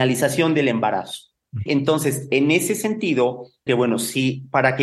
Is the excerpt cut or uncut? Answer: cut